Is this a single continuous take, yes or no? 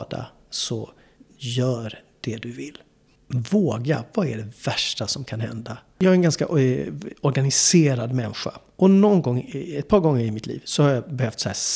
no